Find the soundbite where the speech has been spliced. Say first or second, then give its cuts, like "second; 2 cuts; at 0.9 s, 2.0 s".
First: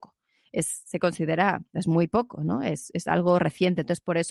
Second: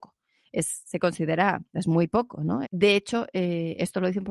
second; 1 cut; at 2.6 s